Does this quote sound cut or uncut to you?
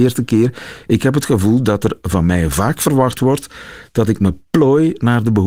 uncut